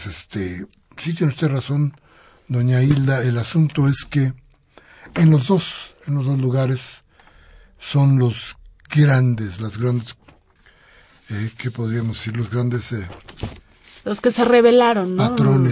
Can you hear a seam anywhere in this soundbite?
no; 0 cuts

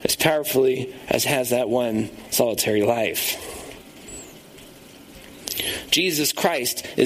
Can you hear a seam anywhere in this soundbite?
no; 0 cuts

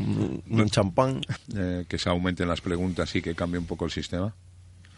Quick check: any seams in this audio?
yes; 1 cut; at 1.4 s

